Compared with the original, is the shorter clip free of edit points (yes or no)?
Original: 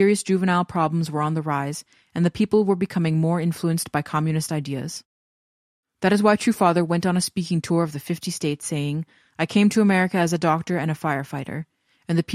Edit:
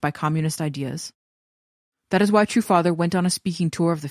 yes